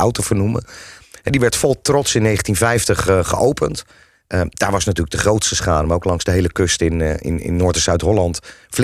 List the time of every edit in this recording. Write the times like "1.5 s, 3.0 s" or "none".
4.1 s

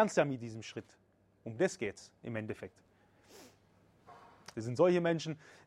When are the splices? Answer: 4.5 s

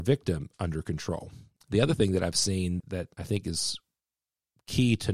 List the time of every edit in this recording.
1.6 s, 2.8 s

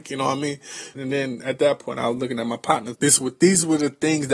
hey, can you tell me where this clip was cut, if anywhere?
0.9 s, 2.9 s

